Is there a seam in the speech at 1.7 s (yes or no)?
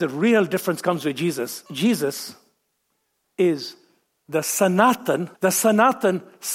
yes